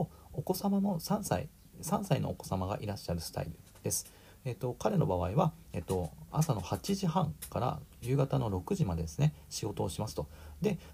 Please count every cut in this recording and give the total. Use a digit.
0